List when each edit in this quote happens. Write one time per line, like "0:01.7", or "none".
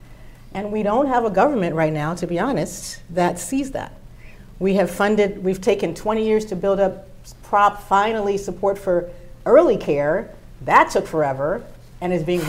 none